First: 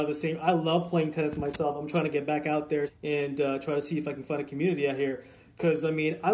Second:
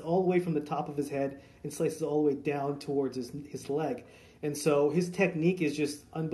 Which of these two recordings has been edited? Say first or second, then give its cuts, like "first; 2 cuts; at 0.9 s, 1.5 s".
first; 1 cut; at 2.9 s